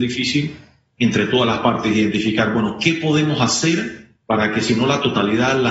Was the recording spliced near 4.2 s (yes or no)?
yes